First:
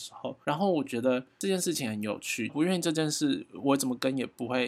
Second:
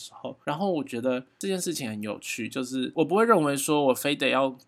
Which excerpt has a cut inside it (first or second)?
first